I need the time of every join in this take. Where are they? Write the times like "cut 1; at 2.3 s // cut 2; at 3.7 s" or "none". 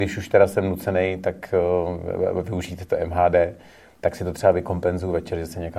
none